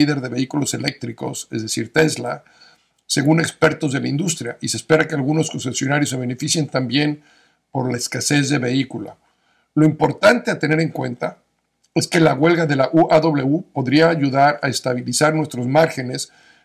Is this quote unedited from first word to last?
yes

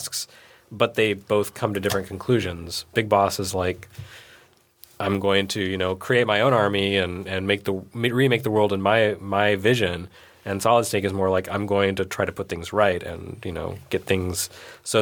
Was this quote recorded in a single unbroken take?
yes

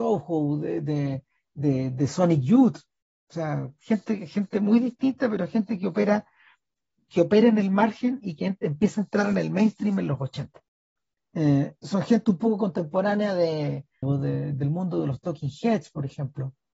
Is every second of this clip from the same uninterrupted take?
no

